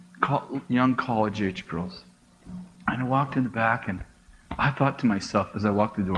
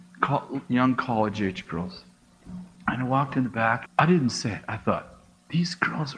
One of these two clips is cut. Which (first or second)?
second